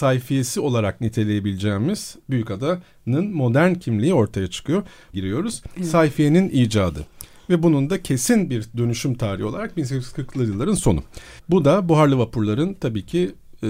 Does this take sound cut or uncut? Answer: cut